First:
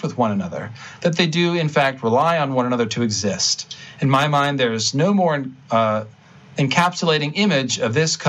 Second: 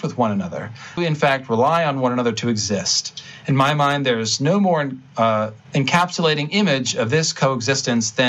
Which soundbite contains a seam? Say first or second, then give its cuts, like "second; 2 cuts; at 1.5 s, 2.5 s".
second; 2 cuts; at 1.0 s, 5.7 s